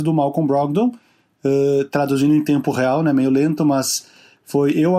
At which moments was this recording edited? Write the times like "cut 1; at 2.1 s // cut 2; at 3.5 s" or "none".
none